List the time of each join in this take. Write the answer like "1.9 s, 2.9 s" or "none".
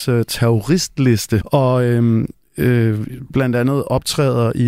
1.4 s